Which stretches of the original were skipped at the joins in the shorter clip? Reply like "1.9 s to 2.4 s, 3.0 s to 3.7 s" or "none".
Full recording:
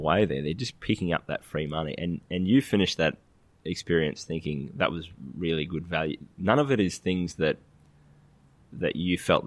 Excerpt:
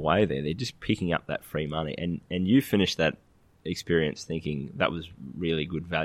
none